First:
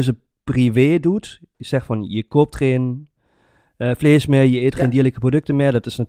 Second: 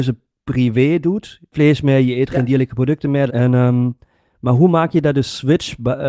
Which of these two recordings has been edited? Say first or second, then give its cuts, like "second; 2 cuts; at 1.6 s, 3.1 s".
second; 2 cuts; at 1.5 s, 3.3 s